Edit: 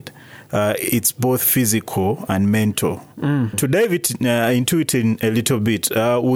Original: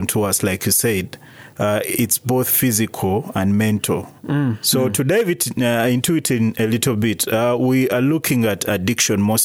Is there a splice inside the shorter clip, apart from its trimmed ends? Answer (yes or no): yes